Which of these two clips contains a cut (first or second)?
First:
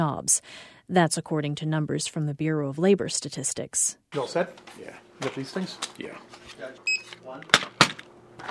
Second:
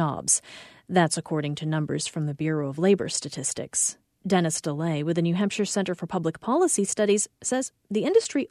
first